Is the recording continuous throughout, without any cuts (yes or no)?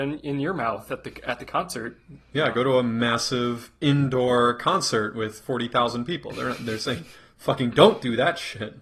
yes